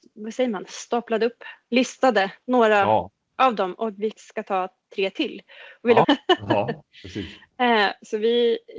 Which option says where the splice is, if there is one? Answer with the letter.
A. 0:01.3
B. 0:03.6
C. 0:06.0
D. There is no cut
C